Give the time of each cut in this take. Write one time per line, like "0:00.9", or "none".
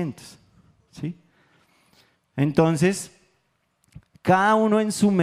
none